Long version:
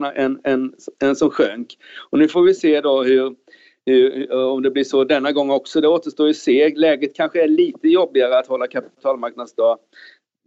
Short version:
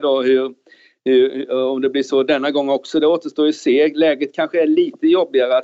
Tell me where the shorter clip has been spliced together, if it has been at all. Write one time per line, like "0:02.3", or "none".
none